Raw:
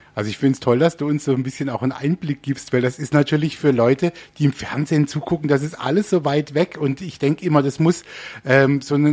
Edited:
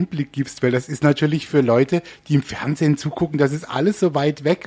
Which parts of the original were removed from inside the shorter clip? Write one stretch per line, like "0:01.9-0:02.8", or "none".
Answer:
none